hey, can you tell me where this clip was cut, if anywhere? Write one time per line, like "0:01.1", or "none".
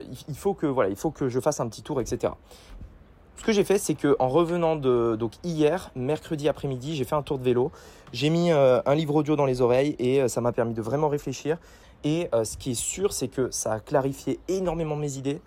0:11.8